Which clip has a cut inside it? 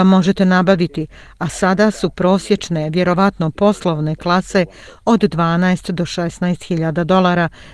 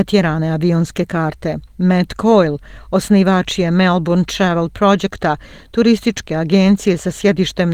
second; 1 cut; at 1.7 s

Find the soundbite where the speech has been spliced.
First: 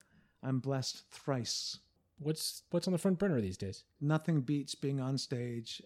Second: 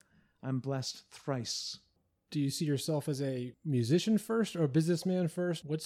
first; 2 cuts; at 2.2 s, 4.0 s

